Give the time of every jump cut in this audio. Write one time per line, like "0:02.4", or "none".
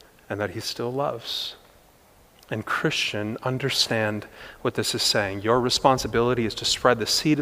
none